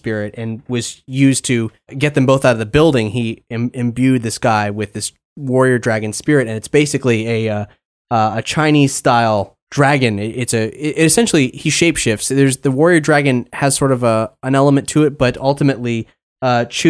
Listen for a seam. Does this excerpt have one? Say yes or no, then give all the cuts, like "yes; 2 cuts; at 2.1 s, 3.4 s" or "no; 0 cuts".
no; 0 cuts